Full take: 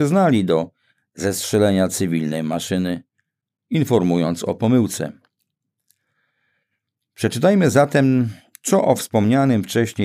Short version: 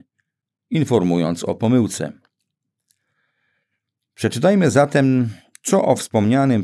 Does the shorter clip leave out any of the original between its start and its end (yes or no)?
no